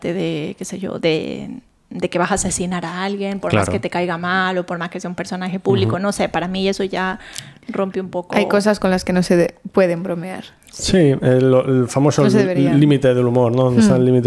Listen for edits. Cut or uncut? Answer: uncut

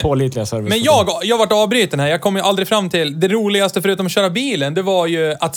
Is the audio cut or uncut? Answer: uncut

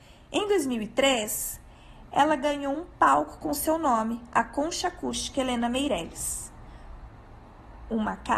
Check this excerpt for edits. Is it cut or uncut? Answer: uncut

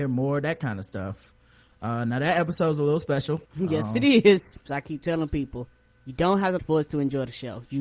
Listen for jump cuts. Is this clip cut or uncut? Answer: cut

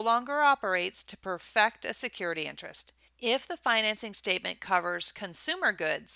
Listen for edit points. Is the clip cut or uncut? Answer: cut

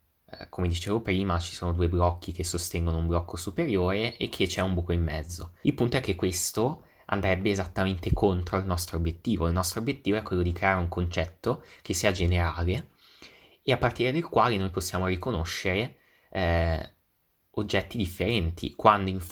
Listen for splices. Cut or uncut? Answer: cut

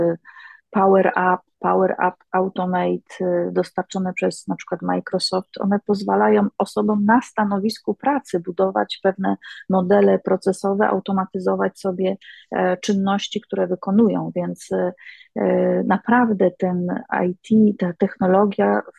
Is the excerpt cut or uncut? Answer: uncut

